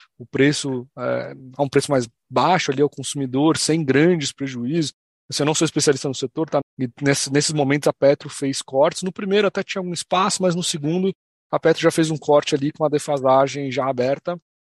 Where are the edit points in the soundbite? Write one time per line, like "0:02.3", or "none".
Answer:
0:06.6

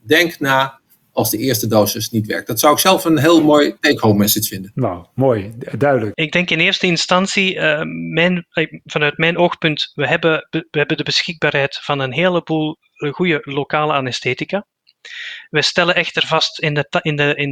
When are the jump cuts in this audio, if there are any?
0:06.1

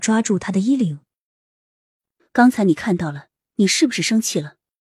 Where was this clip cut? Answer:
0:03.5

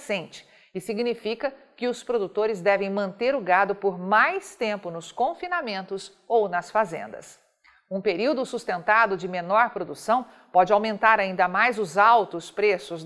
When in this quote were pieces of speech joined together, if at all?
none

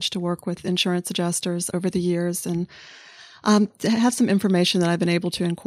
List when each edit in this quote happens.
0:01.7

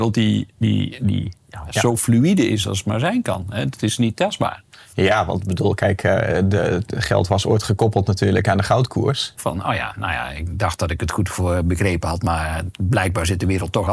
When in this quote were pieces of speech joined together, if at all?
0:09.4

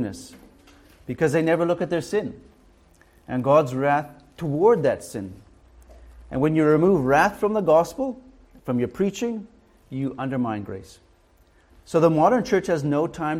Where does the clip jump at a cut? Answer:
0:11.7

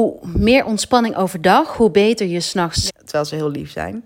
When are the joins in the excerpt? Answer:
0:02.9

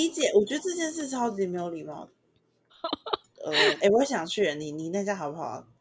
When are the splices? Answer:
0:02.7
0:03.7

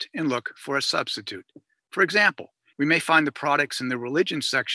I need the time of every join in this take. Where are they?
0:02.7

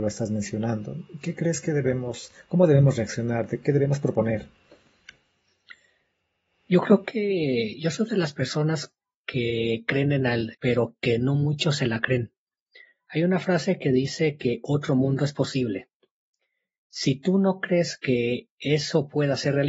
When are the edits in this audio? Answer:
0:10.5

